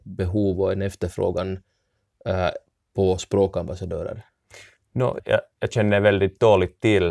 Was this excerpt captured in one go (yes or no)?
no